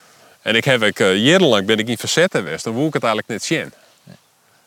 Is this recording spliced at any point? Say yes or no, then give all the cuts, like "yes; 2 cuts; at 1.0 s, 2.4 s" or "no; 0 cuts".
no; 0 cuts